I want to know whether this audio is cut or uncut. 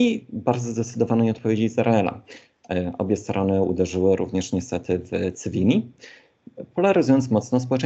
uncut